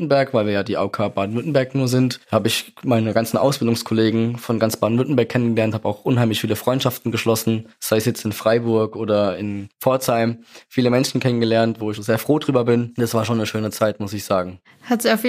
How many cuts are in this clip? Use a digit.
0